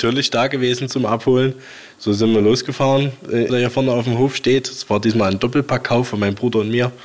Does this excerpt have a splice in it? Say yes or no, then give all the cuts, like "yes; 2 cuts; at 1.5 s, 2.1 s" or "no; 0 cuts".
yes; 1 cut; at 3.5 s